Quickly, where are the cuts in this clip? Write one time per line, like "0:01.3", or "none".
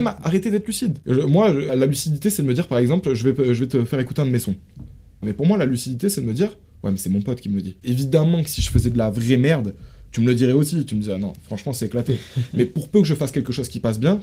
0:01.7
0:05.2
0:07.8